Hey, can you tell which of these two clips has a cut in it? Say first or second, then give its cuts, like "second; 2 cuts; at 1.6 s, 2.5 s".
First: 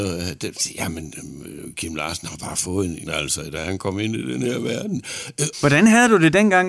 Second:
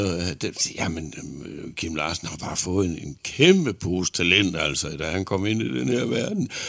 first; 2 cuts; at 3.1 s, 5.5 s